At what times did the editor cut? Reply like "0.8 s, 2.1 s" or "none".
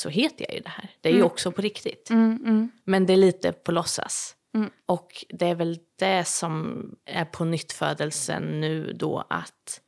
none